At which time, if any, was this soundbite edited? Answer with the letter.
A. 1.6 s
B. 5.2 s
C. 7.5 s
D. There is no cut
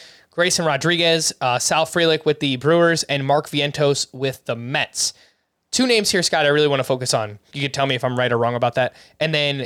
C